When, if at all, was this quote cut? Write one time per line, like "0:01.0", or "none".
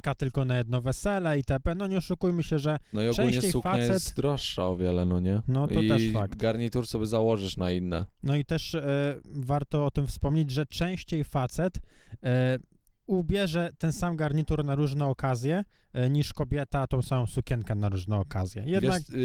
none

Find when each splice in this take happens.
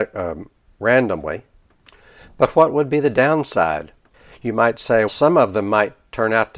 0:05.1

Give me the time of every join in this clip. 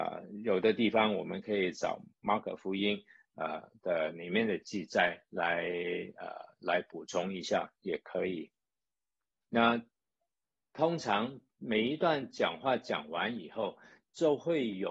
0:09.4

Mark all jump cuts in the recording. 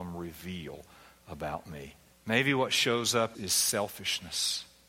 0:02.1
0:03.3

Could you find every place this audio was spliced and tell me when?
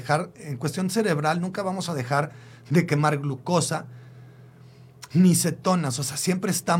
none

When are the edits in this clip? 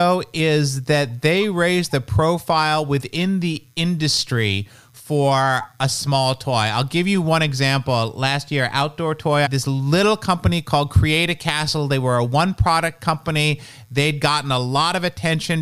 0:09.5

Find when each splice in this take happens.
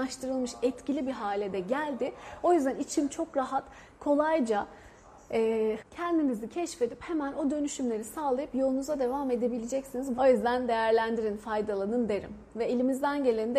0:05.8
0:10.2

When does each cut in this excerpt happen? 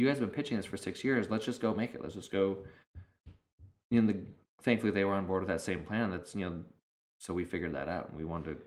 none

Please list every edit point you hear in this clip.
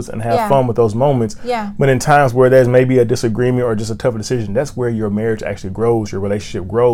none

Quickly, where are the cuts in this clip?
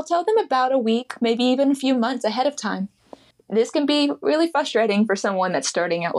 0:03.3

